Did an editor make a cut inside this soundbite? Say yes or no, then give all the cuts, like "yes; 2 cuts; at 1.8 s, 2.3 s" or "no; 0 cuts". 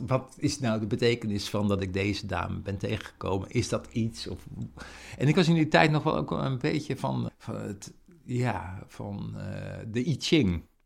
yes; 1 cut; at 7.3 s